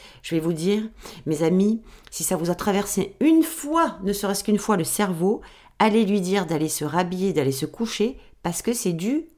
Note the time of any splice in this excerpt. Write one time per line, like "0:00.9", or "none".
none